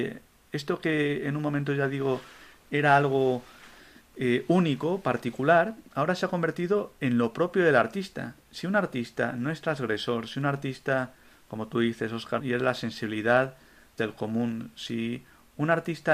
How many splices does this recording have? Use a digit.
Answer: 2